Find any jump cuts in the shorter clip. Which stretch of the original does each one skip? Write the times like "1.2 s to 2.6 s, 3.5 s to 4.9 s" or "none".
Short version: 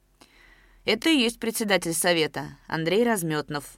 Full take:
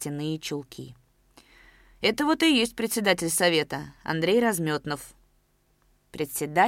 2.2 s to 2.4 s